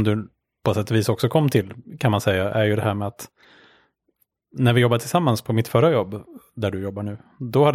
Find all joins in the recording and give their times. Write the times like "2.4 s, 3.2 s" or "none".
none